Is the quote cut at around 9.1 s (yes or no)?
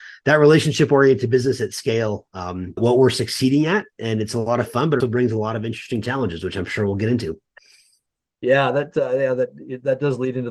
no